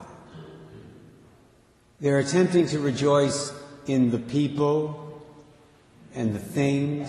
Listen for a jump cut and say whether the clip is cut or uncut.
uncut